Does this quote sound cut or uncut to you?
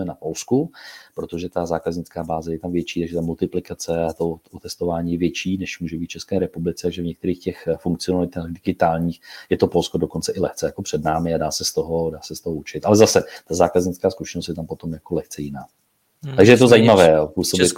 uncut